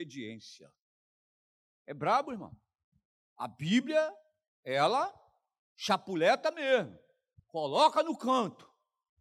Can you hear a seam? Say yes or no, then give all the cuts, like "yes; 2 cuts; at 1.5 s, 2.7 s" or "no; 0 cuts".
no; 0 cuts